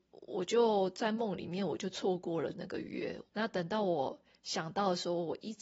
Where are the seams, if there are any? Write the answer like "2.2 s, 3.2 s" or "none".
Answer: 3.3 s